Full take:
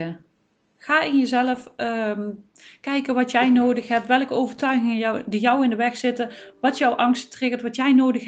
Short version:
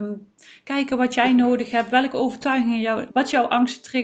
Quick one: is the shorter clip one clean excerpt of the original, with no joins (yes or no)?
no